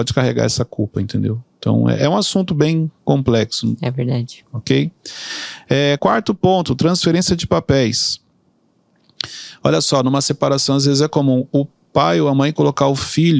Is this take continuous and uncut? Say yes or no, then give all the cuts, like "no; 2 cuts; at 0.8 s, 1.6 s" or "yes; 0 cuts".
yes; 0 cuts